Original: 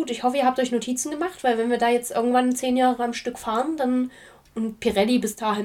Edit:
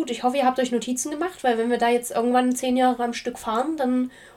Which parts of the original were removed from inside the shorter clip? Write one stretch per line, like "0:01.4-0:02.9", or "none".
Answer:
none